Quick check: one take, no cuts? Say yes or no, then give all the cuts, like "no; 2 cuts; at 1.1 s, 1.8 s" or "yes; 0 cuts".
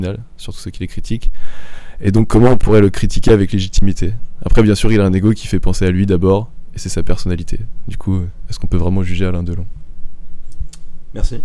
yes; 0 cuts